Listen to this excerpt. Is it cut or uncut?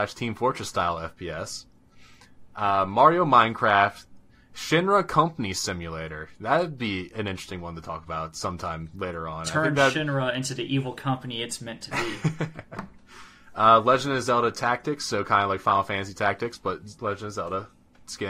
uncut